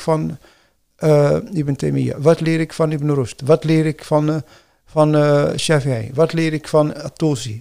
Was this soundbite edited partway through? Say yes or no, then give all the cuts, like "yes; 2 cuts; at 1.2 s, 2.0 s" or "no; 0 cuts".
no; 0 cuts